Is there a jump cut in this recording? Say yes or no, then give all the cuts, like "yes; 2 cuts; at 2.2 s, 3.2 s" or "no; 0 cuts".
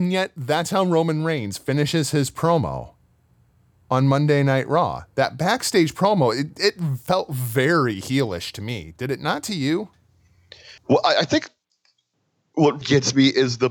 yes; 2 cuts; at 10.8 s, 12.8 s